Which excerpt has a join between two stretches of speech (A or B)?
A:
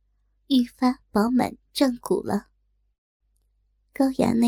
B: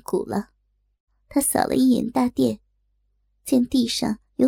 B